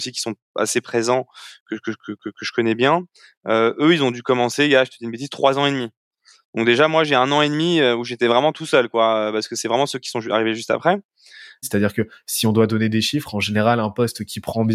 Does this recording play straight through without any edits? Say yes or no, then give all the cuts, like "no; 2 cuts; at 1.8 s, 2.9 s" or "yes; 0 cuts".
no; 1 cut; at 11.6 s